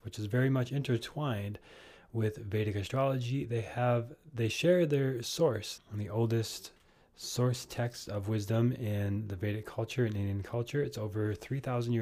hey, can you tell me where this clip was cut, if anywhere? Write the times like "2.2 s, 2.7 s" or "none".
5.8 s